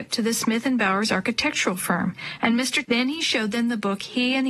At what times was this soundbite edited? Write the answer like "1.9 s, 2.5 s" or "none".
2.8 s